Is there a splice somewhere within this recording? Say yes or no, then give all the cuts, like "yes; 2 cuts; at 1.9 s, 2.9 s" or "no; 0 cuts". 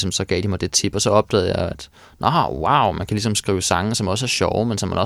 no; 0 cuts